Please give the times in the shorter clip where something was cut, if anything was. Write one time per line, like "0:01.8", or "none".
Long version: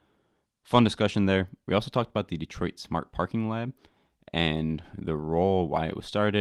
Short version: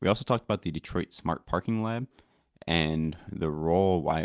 none